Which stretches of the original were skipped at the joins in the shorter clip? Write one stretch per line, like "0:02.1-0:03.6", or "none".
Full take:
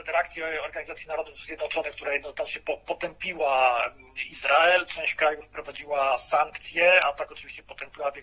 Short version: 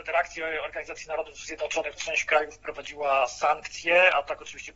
0:02.0-0:04.9